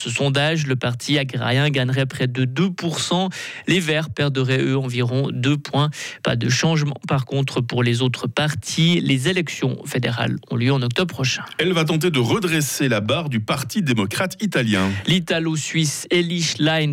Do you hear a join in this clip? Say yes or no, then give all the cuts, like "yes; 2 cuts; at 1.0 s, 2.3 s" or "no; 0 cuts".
no; 0 cuts